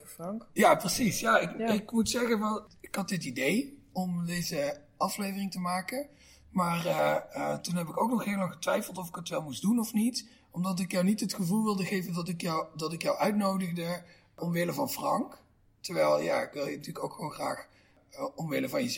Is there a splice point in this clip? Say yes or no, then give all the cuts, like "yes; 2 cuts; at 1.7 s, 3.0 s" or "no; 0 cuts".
no; 0 cuts